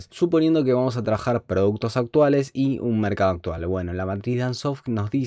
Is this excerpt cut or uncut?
uncut